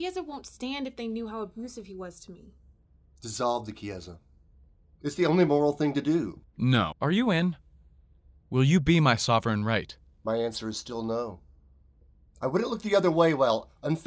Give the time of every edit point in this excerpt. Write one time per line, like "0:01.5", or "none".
0:06.9